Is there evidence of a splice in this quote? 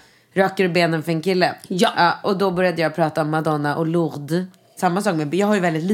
yes; 1 cut; at 4.8 s

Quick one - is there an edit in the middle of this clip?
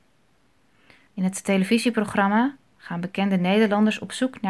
yes; 1 cut; at 1.1 s

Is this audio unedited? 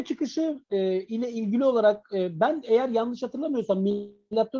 yes; 0 cuts

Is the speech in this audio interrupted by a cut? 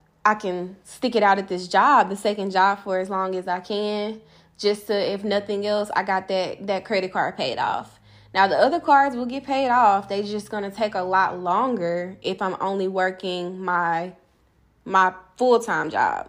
no; 0 cuts

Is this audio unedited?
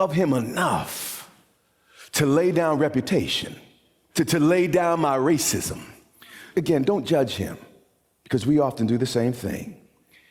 no; 2 cuts; at 4.1 s, 6.5 s

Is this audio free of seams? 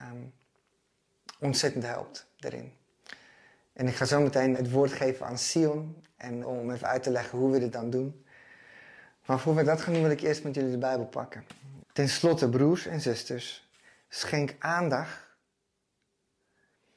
no; 3 cuts; at 4.5 s, 6.4 s, 11.8 s

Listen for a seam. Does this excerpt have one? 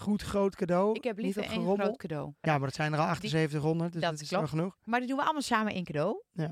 yes; 1 cut; at 2.4 s

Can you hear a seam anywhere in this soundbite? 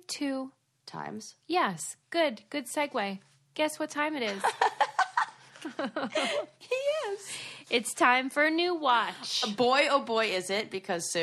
no; 0 cuts

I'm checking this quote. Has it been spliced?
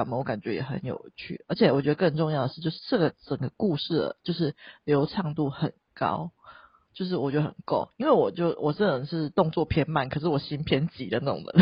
no; 0 cuts

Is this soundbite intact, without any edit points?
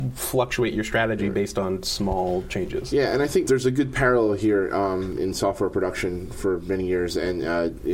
no; 1 cut; at 5.2 s

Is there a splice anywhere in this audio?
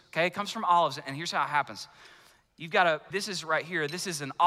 yes; 1 cut; at 3.1 s

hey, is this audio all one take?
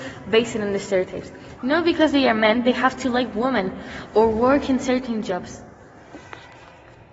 no; 1 cut; at 1.6 s

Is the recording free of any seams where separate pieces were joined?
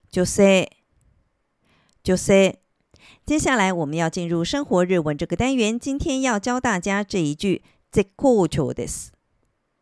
yes; 0 cuts

